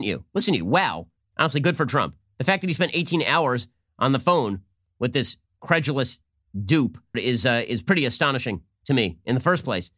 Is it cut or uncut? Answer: cut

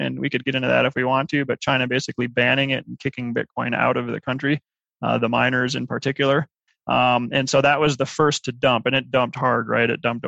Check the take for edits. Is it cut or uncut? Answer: uncut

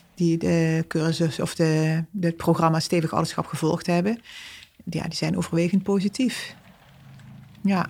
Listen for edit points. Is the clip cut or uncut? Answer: uncut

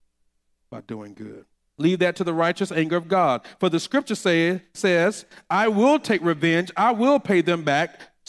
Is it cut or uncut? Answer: cut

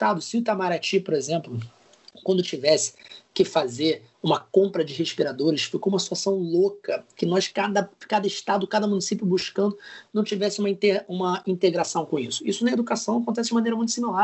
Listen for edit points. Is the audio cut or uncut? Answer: uncut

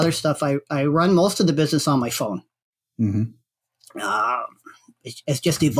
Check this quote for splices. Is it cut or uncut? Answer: uncut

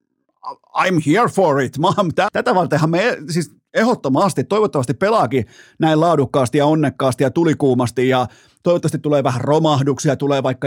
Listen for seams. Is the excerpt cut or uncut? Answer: cut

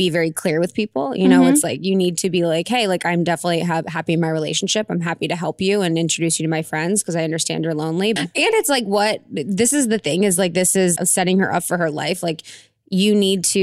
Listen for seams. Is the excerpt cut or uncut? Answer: cut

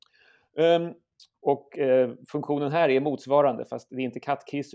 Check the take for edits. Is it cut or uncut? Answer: cut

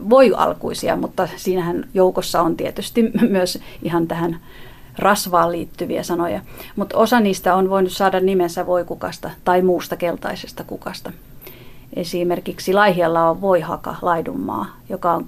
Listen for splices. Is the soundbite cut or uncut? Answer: uncut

